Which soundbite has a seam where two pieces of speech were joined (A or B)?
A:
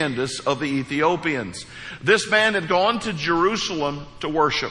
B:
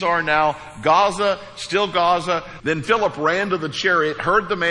B